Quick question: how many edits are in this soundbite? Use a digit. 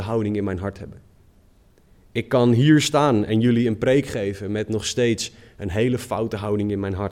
0